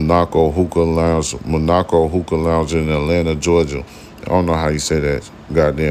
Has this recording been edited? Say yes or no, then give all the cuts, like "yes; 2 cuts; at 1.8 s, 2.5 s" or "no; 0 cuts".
no; 0 cuts